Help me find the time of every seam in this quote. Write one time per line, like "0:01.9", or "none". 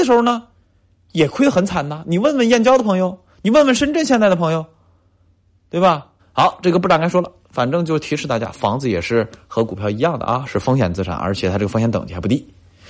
0:06.2